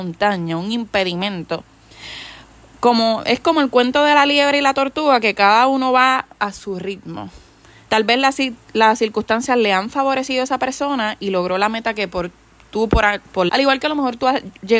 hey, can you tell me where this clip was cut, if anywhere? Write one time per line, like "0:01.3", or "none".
0:07.9
0:13.5